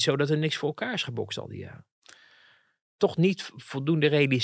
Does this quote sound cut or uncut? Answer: cut